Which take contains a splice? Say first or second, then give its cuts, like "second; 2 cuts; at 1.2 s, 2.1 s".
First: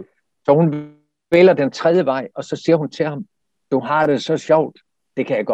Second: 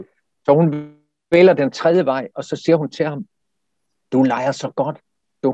first; 1 cut; at 3.6 s